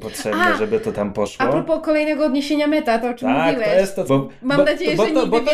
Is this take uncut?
no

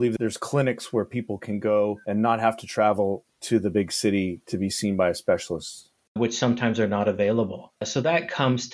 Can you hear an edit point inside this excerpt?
yes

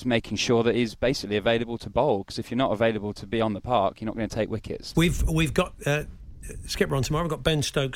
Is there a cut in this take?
yes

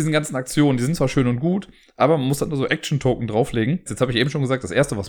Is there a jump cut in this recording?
yes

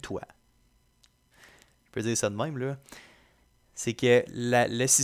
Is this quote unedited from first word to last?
yes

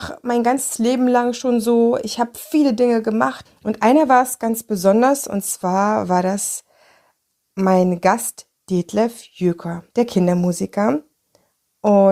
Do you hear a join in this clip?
yes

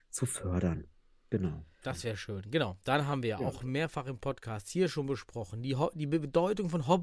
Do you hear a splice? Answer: yes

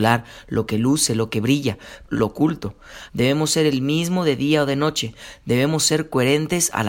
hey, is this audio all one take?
no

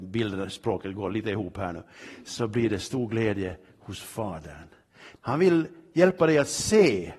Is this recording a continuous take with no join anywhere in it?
no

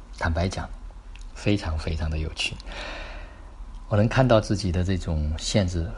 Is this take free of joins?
no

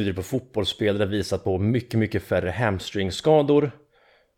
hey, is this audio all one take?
yes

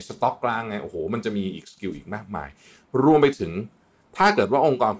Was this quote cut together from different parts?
no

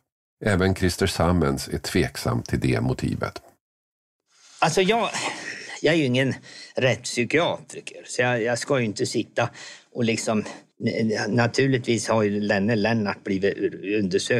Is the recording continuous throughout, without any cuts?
yes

